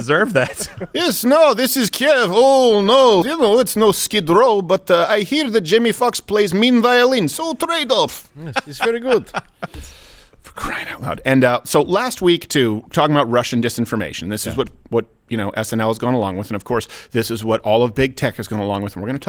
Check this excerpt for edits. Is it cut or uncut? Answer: cut